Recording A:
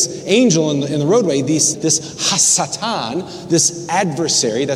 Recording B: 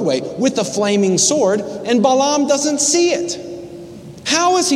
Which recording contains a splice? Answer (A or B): A